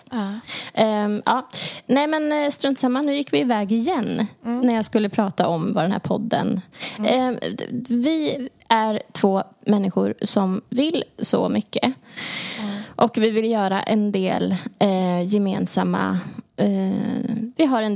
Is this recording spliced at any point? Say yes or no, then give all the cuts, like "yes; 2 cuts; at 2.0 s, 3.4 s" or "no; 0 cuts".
no; 0 cuts